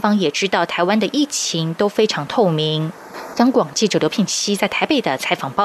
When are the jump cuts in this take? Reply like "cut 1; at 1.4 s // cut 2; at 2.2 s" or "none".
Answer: cut 1; at 3.3 s